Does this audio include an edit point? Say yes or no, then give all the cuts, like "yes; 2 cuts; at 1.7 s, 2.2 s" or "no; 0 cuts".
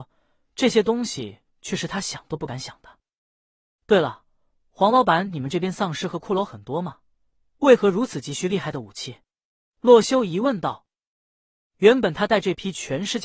yes; 1 cut; at 3.8 s